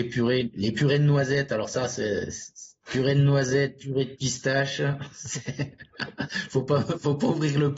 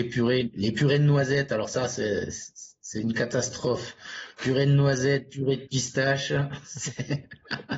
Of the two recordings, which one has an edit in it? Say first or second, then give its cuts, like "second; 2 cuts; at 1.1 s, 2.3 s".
first; 1 cut; at 2.8 s